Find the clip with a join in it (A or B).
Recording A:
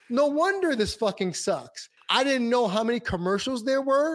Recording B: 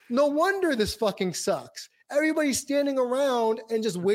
A